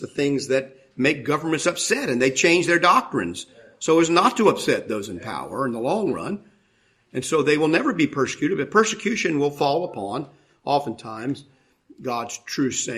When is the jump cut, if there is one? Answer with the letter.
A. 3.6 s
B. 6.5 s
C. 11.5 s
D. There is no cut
D